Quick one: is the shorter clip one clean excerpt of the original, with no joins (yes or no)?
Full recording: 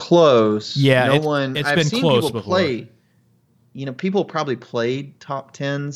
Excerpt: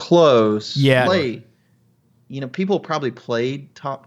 no